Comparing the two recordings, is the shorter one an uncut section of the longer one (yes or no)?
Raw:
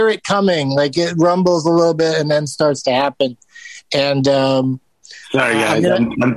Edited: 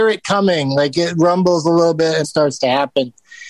no